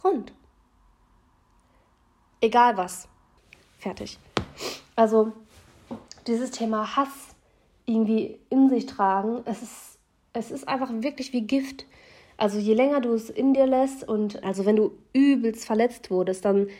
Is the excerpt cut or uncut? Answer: cut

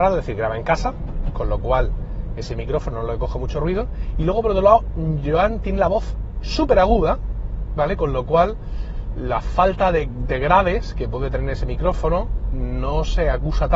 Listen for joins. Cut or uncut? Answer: uncut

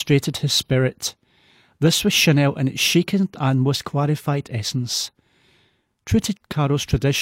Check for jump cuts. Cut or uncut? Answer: uncut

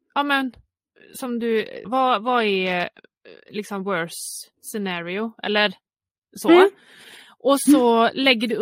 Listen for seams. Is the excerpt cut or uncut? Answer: cut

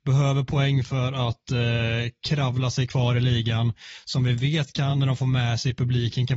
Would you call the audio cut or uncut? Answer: uncut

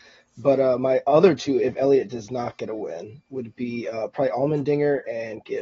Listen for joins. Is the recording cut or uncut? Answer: uncut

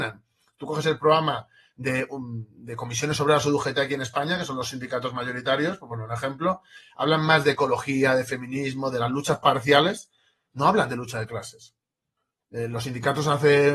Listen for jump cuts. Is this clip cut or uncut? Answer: uncut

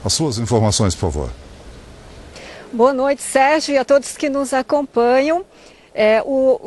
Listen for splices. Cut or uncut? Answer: uncut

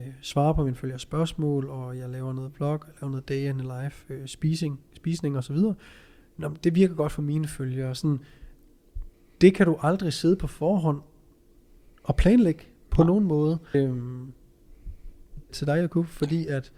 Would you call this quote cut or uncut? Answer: cut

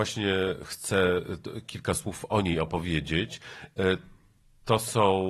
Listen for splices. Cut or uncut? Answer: uncut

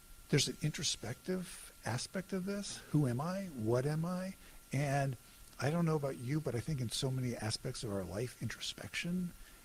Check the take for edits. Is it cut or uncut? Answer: uncut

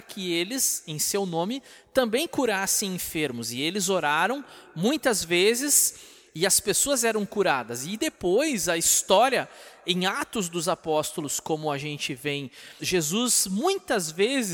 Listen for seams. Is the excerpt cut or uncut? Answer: cut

